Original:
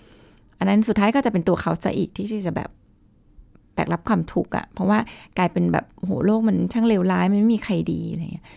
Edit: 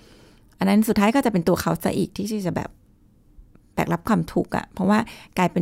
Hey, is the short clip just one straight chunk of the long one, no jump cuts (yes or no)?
yes